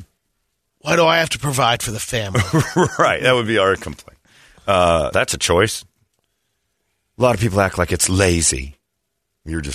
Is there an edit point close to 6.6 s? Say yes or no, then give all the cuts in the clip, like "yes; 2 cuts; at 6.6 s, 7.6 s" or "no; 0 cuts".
no; 1 cut; at 5.1 s